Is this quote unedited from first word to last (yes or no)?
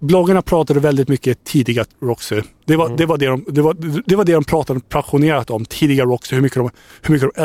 yes